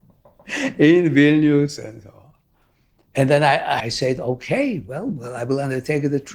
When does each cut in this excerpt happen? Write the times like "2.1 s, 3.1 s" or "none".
3.8 s